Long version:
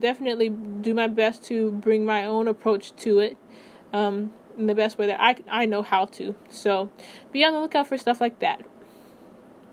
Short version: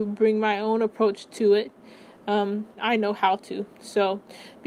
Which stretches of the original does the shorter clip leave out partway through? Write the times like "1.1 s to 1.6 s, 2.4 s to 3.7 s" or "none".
4.4 s to 5.4 s